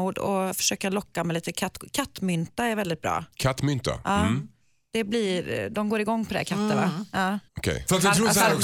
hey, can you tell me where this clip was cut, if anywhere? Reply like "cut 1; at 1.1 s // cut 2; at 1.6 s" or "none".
cut 1; at 7.5 s